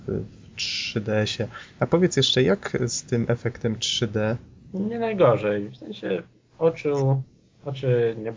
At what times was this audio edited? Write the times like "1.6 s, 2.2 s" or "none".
4.7 s